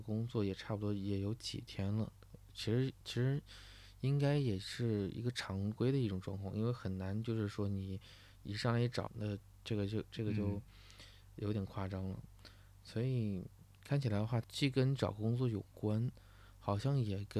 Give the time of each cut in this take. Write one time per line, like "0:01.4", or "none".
0:09.1
0:14.4